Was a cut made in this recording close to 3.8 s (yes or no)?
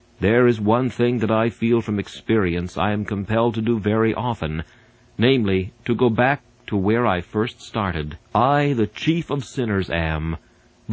no